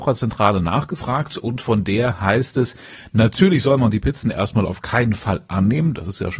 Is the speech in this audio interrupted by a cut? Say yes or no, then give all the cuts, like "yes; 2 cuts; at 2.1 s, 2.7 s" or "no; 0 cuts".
no; 0 cuts